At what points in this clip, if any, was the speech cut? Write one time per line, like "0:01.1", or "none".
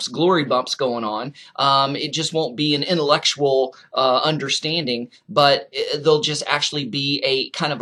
none